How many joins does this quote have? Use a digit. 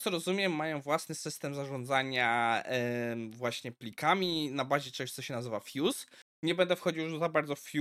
0